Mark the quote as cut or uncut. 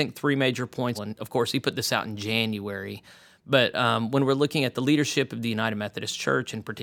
cut